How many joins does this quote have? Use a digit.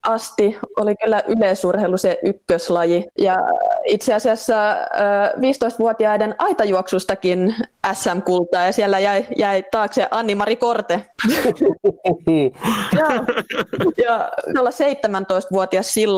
2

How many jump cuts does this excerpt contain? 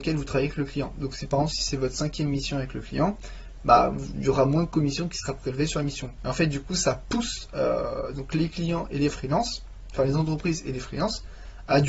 1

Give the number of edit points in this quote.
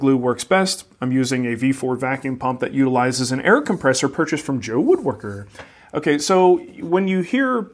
0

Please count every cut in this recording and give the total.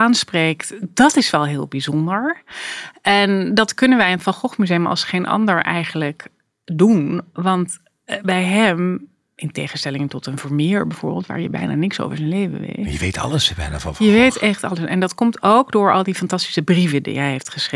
0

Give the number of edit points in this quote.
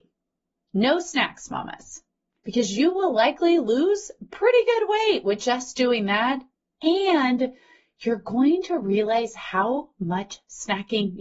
0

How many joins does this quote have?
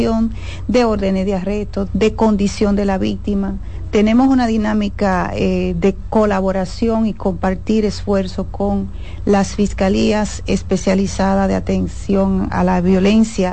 1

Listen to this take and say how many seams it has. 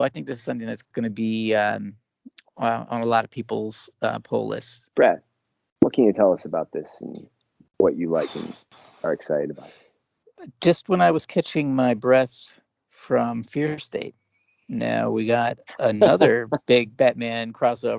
1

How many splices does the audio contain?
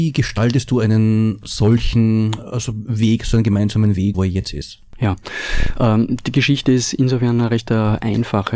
1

